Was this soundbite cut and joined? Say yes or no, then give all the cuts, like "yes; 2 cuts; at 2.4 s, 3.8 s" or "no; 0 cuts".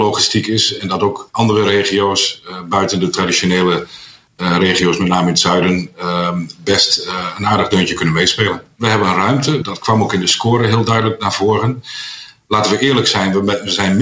yes; 1 cut; at 9.6 s